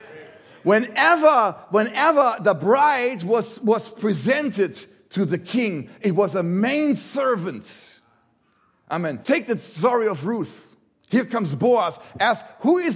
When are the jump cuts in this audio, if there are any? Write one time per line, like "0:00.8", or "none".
0:09.2

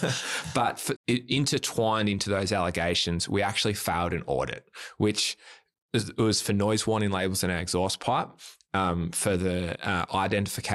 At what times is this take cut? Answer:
0:00.9

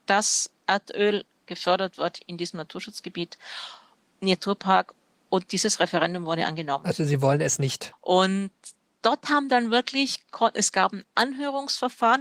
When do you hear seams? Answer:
0:07.9

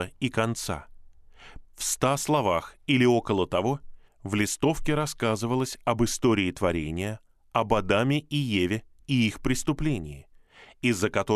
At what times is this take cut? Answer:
0:01.7

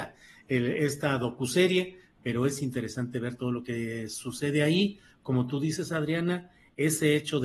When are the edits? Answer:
none

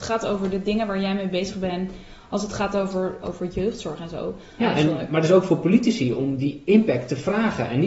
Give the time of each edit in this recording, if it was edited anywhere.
0:03.2
0:04.6

